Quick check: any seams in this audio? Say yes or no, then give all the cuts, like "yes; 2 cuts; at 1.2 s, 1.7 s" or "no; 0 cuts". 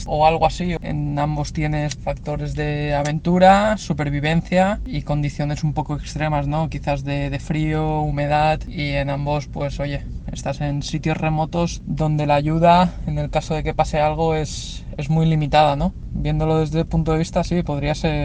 no; 0 cuts